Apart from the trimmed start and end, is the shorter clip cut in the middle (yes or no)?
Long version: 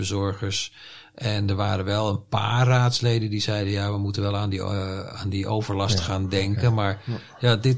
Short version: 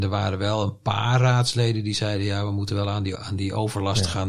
yes